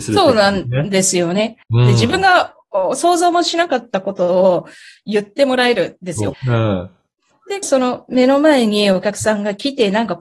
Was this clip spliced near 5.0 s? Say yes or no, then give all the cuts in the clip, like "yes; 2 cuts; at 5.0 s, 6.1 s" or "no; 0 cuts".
no; 3 cuts; at 1.6 s, 6.3 s, 7.6 s